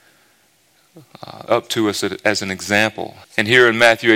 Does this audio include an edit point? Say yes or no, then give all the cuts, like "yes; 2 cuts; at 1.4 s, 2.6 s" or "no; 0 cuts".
yes; 2 cuts; at 1.5 s, 3.2 s